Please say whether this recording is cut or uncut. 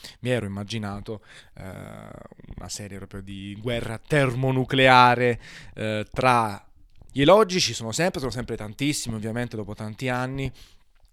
cut